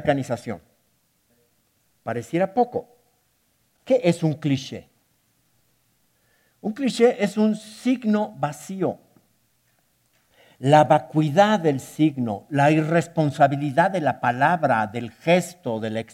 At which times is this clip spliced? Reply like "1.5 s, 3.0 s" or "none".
none